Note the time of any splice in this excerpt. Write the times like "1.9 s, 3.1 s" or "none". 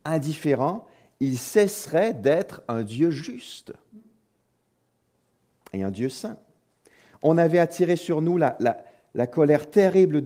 none